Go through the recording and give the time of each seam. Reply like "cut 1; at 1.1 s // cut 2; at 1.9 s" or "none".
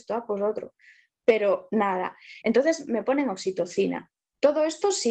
cut 1; at 2.4 s